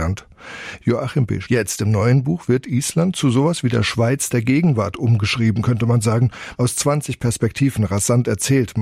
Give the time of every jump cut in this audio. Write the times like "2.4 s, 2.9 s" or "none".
1.4 s, 6.6 s